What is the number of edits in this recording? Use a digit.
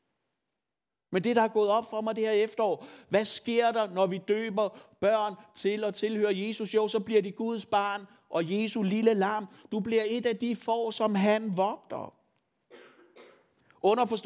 0